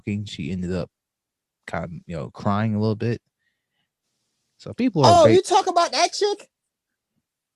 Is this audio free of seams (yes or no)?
yes